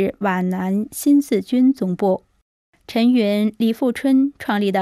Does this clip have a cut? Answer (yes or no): yes